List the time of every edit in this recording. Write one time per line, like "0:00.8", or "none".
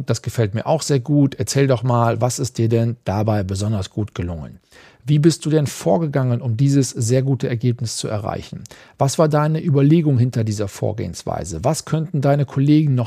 none